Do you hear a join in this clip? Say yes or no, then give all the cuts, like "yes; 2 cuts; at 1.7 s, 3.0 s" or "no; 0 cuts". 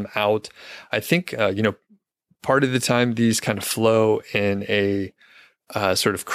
no; 0 cuts